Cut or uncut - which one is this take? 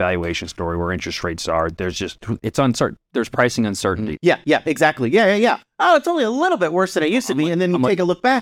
cut